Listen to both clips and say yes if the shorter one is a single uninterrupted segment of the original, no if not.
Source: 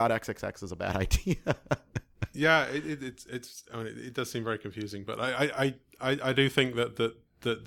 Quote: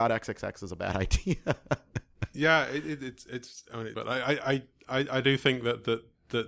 no